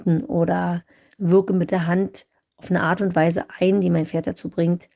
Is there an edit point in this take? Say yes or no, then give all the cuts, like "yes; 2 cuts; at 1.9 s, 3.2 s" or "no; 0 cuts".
yes; 1 cut; at 1.1 s